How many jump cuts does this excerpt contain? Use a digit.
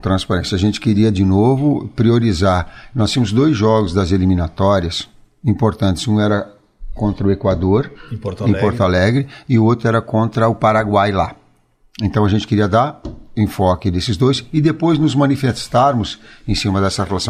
0